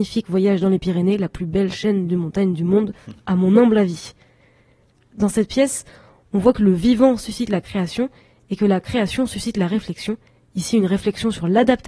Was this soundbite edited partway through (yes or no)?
no